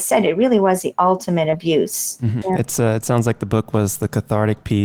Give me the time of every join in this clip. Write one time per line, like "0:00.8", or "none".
0:02.4

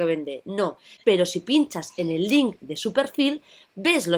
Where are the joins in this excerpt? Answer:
0:01.0

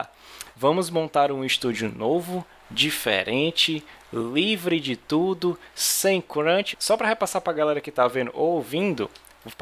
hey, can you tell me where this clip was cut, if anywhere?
0:06.7

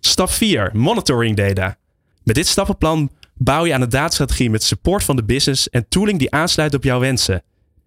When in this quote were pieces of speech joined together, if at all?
0:02.1

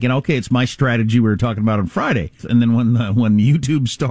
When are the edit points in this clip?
0:02.4

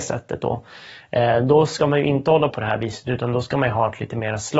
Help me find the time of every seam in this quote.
0:02.5

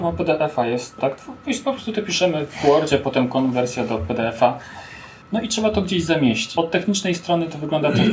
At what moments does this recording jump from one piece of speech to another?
0:01.0

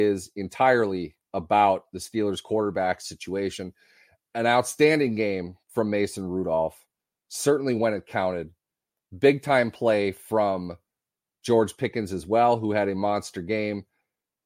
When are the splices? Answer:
none

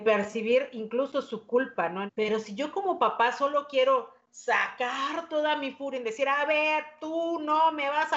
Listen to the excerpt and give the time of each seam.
0:02.1

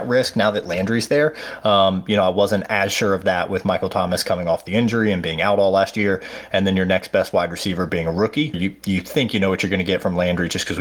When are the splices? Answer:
0:08.5

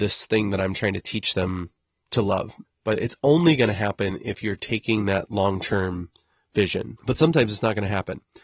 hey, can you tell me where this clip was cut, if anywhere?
0:02.7
0:07.0

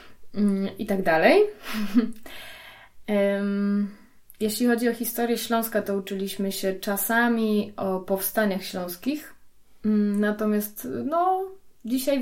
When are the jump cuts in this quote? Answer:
none

